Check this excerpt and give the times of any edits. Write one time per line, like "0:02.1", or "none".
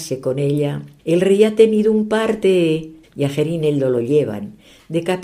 0:01.0
0:03.0